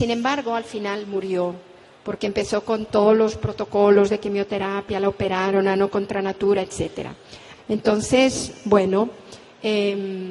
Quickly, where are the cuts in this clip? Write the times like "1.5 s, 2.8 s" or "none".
7.5 s

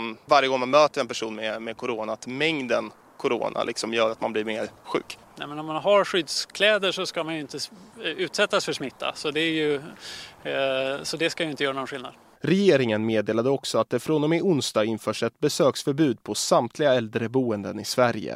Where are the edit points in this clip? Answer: none

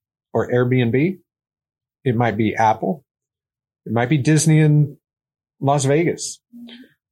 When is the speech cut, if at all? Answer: none

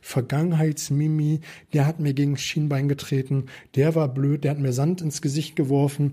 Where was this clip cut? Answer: none

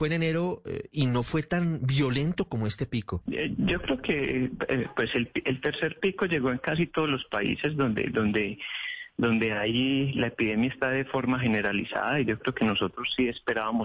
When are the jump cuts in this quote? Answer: 3.3 s

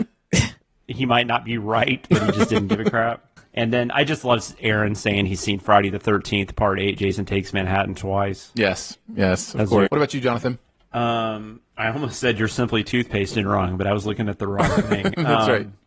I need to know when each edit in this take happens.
9.9 s

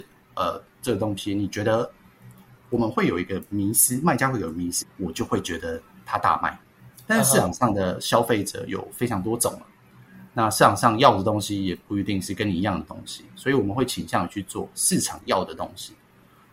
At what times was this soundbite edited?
4.8 s

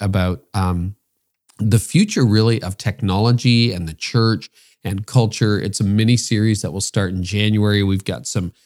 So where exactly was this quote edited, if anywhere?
none

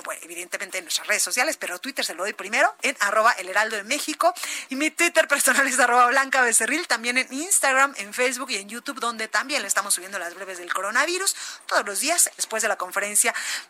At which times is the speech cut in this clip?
4.7 s, 12.4 s

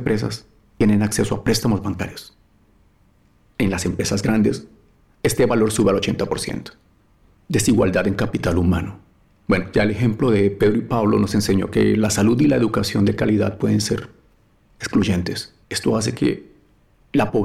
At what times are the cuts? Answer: 15.6 s

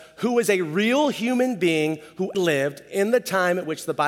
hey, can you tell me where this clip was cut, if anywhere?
2.3 s

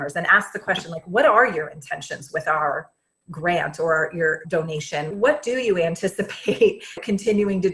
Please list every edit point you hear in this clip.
none

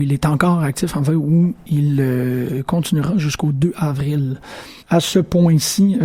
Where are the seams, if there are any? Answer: 4.8 s

